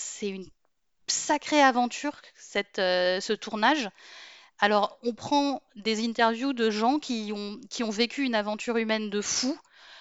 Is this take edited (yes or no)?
no